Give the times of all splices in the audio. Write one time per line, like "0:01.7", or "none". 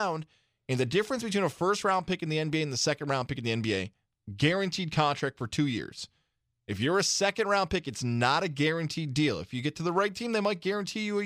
none